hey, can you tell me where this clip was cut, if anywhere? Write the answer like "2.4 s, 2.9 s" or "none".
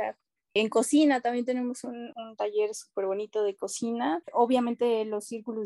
4.2 s